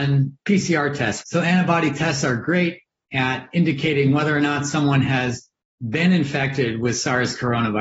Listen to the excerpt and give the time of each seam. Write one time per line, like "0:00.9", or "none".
0:01.2

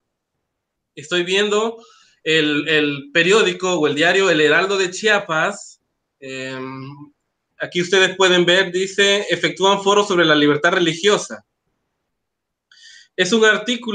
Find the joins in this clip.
none

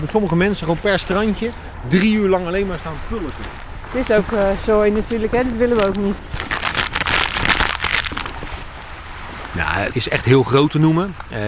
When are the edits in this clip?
0:09.9

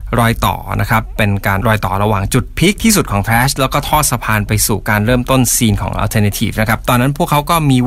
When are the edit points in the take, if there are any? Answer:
0:01.6

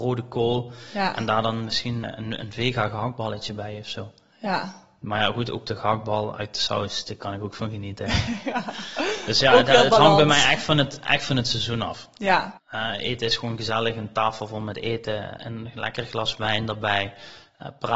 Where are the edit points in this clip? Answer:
0:02.0
0:12.6
0:15.4

